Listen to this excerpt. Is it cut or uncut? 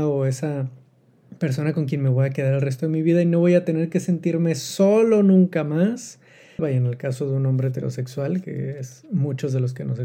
cut